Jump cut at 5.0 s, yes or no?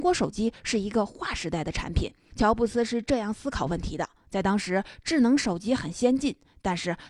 no